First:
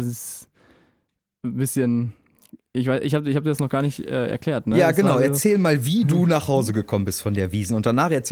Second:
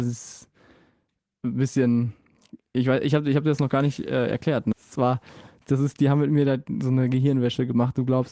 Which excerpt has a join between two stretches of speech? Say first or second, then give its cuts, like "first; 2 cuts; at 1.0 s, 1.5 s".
second; 1 cut; at 4.7 s